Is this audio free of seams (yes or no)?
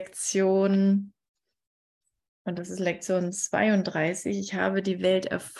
yes